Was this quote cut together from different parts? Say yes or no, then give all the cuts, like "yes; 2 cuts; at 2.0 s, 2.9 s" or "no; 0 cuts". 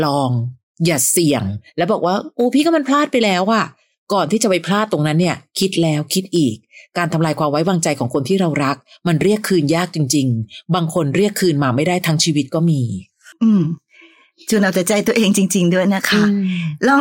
no; 0 cuts